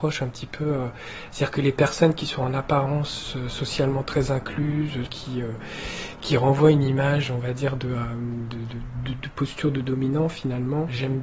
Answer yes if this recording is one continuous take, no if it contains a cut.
no